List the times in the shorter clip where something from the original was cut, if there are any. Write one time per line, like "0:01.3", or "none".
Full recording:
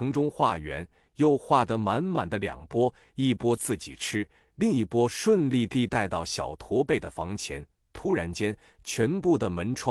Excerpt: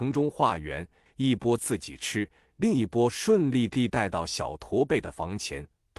0:01.1

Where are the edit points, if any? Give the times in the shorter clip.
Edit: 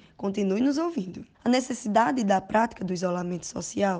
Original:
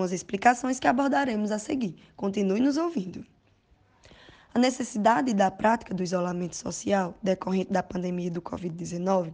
0:01.3

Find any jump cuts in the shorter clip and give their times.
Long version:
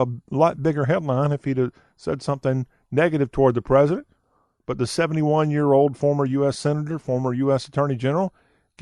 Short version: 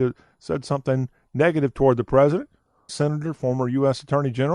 0:02.9

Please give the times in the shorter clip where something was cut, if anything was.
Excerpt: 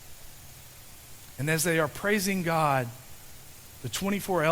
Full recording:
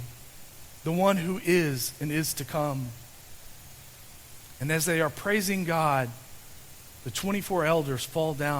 none

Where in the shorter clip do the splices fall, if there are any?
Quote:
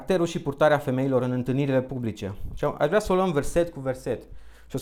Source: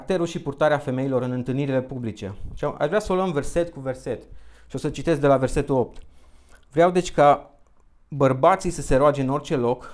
none

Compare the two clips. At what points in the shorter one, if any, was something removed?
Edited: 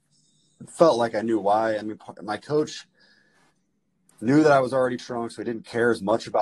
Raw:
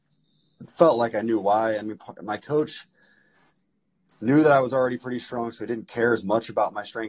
0:05.0

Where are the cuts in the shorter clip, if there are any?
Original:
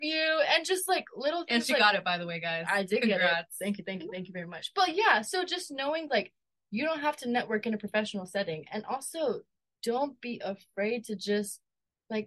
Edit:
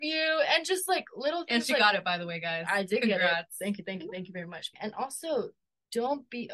0:04.7

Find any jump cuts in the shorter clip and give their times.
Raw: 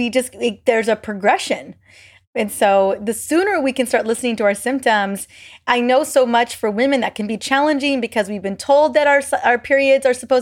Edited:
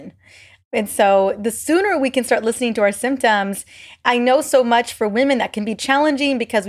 none

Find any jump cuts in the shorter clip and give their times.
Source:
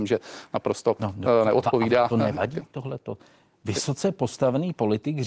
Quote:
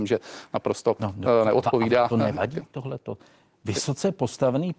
none

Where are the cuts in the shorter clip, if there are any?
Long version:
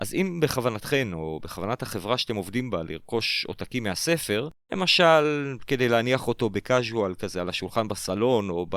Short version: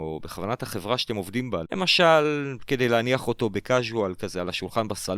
0:01.6

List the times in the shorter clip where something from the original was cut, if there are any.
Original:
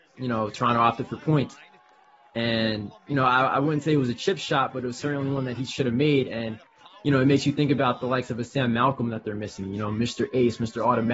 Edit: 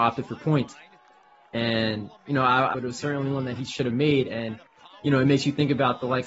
0:02.7

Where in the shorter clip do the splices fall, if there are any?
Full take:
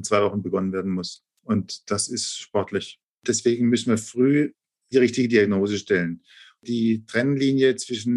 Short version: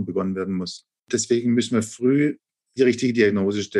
0:01.0

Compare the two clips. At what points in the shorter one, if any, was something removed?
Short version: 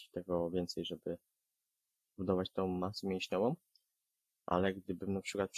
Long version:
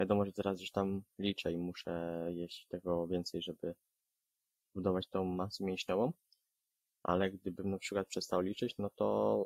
none

